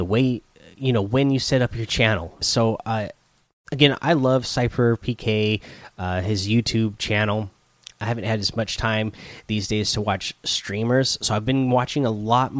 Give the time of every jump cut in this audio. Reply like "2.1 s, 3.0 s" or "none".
2.4 s